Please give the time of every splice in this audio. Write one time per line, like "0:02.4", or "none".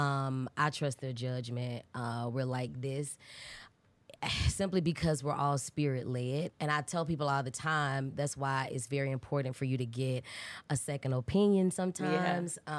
0:06.5